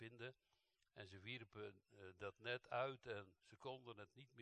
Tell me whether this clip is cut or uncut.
uncut